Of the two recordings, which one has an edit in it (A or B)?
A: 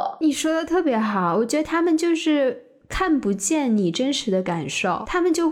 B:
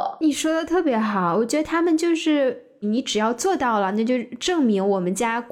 B